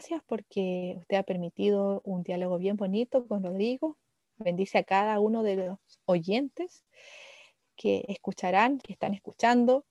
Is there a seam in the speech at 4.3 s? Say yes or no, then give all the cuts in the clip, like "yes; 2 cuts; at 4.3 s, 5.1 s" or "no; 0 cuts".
no; 1 cut; at 8.8 s